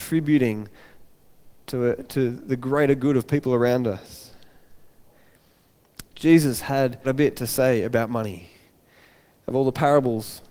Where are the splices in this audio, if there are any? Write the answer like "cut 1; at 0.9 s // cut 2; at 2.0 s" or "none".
cut 1; at 7.0 s